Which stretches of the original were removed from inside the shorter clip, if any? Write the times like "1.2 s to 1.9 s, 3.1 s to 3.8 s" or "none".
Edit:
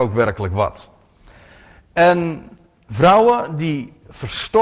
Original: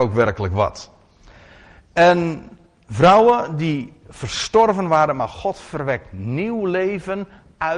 none